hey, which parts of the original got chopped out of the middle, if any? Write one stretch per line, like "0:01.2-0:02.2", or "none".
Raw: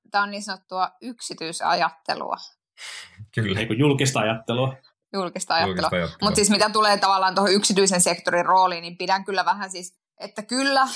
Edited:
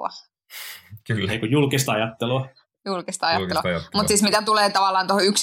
none